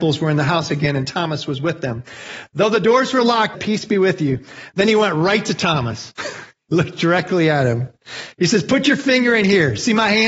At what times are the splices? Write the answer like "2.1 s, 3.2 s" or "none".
3.5 s